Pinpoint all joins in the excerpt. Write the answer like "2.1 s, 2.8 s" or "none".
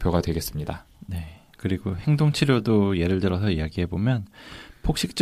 0.9 s